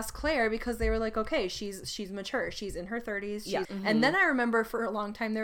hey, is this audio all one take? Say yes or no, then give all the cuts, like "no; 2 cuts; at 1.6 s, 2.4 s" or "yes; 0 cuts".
no; 1 cut; at 3.6 s